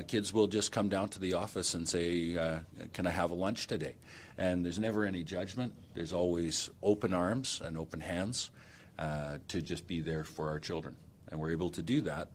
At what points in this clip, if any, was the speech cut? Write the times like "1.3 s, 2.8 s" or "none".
none